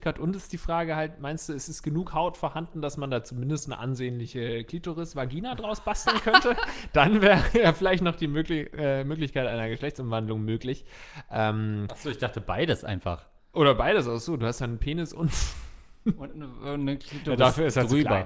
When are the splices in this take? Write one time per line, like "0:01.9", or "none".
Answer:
none